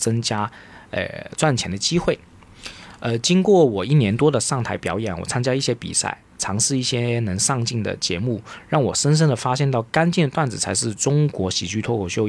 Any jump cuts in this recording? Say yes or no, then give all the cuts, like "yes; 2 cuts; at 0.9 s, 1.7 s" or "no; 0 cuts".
no; 0 cuts